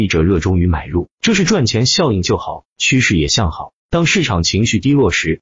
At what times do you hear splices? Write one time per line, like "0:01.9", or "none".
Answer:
0:03.8